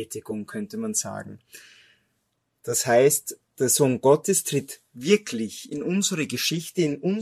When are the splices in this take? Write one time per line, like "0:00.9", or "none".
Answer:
none

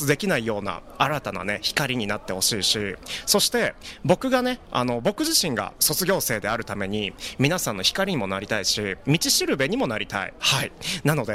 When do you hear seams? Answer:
0:10.4

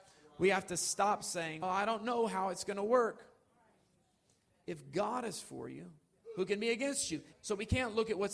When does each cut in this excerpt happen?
0:01.6
0:07.3

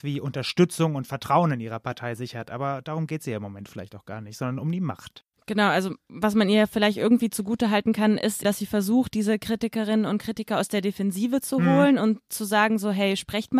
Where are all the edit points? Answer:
0:08.4

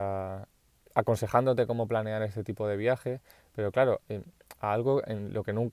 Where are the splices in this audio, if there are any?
0:04.6

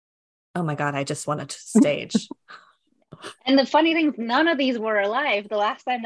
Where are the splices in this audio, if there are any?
none

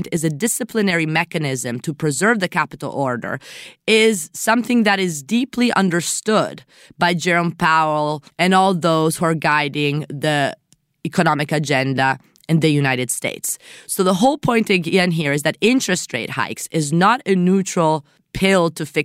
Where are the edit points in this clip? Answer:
0:08.3

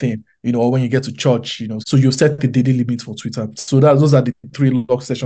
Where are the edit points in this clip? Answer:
0:01.8

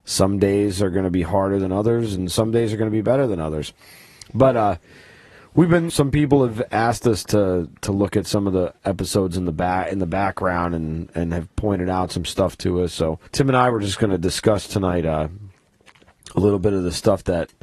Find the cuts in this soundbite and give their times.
0:05.9
0:13.3

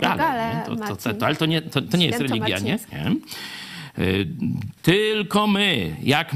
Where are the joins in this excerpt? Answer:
0:02.9
0:04.8

